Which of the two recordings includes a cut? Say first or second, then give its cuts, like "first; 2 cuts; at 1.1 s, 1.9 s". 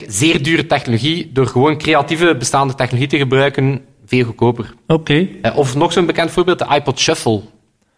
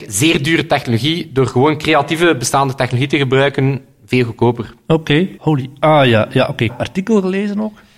second; 2 cuts; at 5.4 s, 6.7 s